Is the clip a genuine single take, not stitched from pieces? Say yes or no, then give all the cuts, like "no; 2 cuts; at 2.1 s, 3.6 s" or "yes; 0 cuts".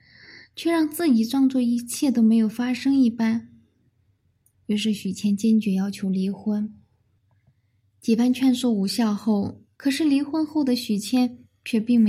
no; 1 cut; at 9.8 s